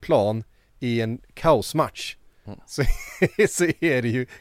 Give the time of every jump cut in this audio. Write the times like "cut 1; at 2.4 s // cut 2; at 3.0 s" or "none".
none